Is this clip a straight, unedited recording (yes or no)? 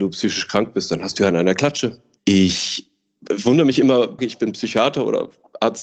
no